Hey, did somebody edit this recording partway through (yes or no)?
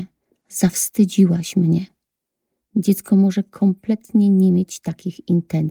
no